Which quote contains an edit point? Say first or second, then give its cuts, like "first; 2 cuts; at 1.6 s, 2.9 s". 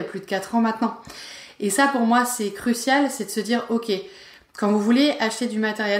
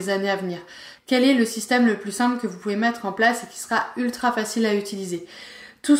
second; 1 cut; at 1.0 s